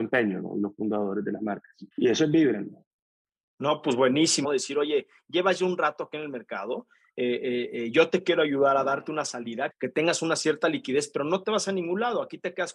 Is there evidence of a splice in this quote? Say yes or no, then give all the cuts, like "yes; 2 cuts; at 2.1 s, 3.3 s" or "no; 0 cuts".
yes; 3 cuts; at 1.9 s, 4.4 s, 9.7 s